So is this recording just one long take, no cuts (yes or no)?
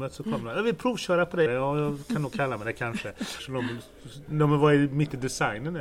no